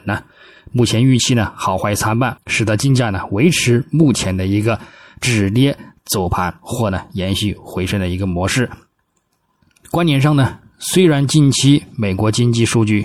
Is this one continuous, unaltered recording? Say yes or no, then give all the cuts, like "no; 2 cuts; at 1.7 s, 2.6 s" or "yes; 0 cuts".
no; 1 cut; at 2.4 s